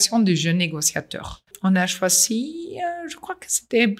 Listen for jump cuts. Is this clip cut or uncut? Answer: cut